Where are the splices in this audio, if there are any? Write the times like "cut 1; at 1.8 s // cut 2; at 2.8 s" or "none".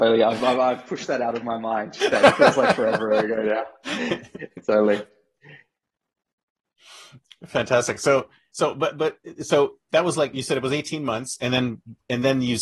none

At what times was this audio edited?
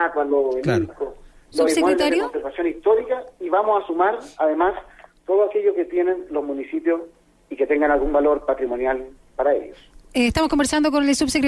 none

